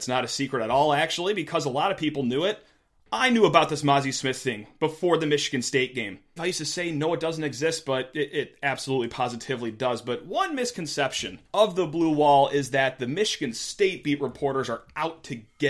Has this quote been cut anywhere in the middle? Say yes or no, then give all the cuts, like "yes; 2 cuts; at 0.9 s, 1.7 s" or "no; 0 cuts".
yes; 2 cuts; at 6.4 s, 11.5 s